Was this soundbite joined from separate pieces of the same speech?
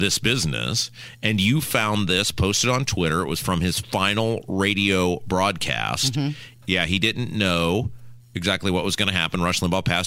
yes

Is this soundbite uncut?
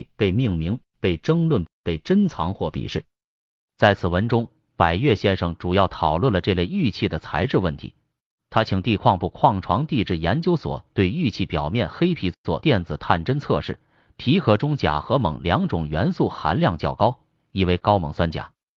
yes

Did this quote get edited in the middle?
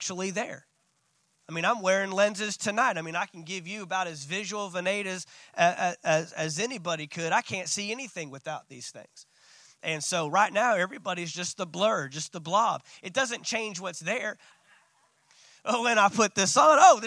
yes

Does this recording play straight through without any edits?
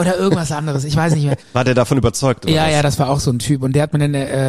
no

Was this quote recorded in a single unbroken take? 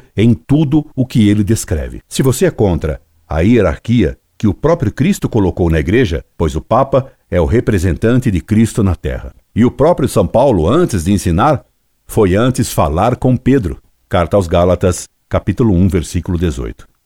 no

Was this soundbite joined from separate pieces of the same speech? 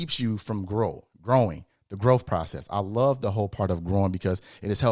no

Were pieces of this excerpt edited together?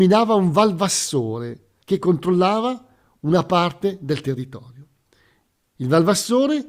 yes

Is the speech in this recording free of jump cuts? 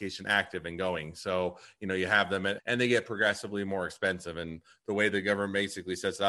no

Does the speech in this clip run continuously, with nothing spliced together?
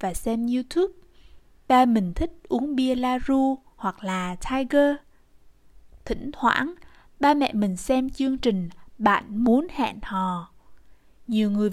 yes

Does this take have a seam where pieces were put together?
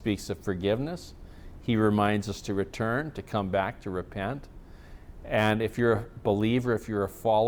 no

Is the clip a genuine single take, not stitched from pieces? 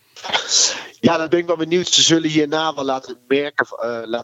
yes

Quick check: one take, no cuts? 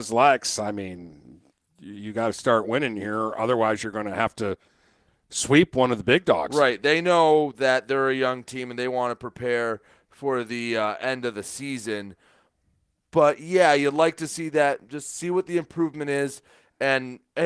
yes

